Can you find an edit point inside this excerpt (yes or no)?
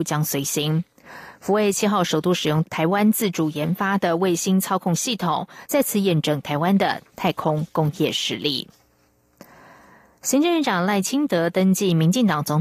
yes